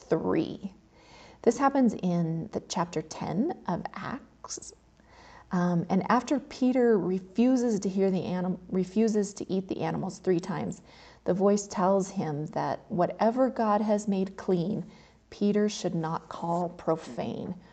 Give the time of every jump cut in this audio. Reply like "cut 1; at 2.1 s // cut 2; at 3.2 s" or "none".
none